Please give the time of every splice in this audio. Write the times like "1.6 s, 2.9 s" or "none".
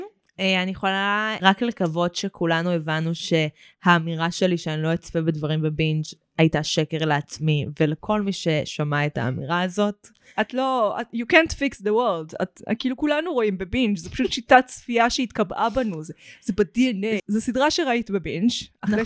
1.4 s, 17.2 s